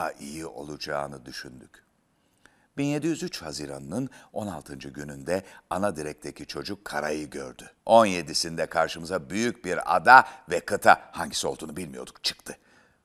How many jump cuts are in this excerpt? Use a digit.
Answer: 1